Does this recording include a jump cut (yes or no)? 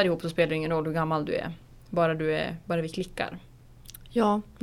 no